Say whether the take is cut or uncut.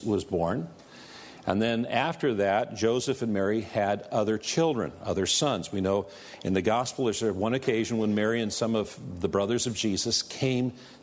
uncut